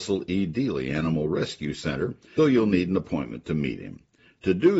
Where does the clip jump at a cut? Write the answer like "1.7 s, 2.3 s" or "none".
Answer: 2.4 s